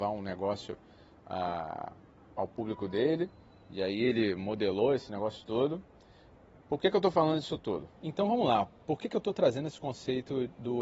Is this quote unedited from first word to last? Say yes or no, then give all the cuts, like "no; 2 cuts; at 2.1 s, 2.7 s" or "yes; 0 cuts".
no; 1 cut; at 8.0 s